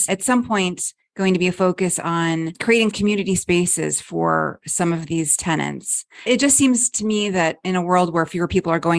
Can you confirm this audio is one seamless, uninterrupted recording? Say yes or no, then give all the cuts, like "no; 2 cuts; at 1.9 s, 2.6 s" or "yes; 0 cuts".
yes; 0 cuts